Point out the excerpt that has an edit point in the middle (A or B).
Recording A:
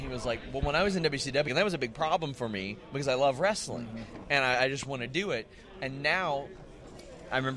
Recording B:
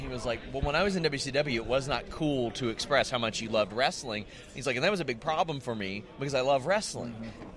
A